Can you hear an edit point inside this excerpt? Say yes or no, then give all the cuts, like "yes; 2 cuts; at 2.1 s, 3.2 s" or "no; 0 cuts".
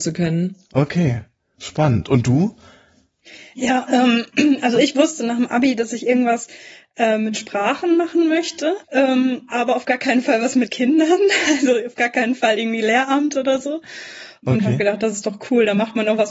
yes; 2 cuts; at 8.8 s, 14.4 s